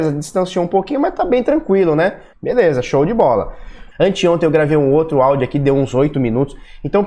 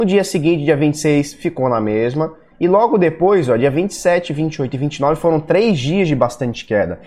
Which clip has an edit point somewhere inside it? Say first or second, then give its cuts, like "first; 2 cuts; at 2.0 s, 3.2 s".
first; 2 cuts; at 2.3 s, 3.9 s